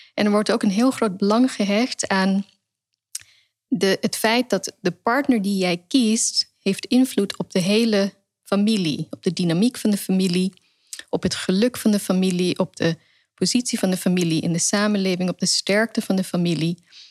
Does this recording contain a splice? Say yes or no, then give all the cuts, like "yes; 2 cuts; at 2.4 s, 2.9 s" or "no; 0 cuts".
no; 0 cuts